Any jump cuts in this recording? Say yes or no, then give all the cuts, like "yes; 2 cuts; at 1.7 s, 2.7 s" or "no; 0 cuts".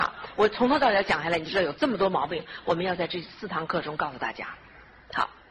no; 0 cuts